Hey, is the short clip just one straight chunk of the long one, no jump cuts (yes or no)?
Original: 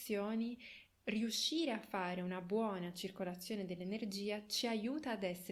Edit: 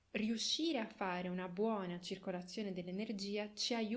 yes